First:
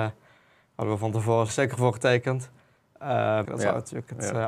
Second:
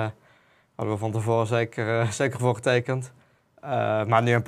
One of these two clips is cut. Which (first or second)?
first